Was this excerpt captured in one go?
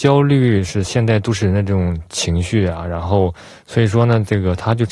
yes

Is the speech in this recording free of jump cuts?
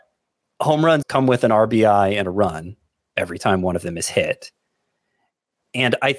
no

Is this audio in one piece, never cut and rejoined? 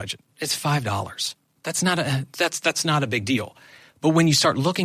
yes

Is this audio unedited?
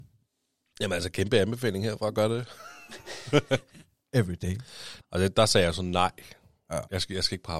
no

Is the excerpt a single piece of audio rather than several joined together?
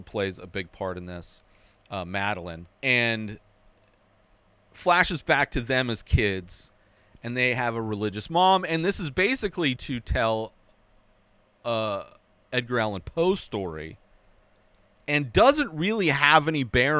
no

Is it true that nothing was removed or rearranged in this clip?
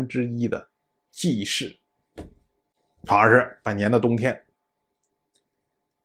yes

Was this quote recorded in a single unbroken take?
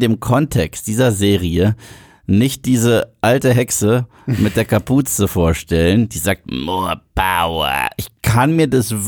yes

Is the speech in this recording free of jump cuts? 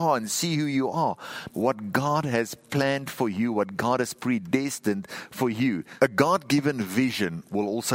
no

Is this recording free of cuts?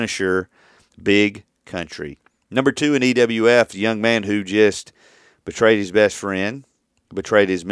yes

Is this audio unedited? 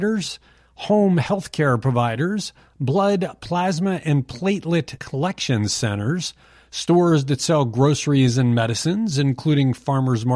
yes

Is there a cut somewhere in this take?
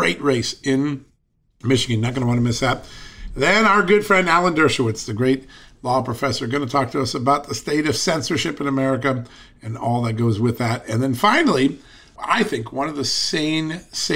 no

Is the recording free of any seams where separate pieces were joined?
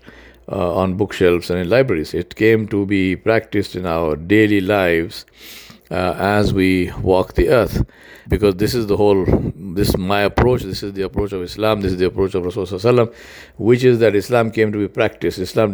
no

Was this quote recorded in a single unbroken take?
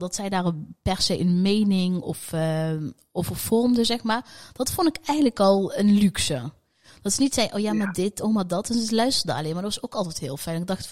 yes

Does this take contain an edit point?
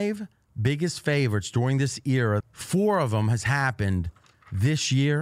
yes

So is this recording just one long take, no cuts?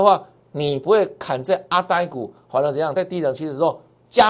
yes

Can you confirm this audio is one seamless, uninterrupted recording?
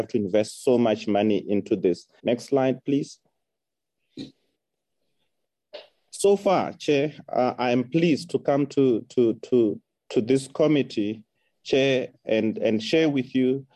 no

